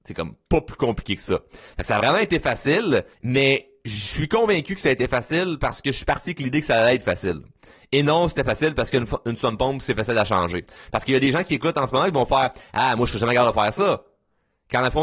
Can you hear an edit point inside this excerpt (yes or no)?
yes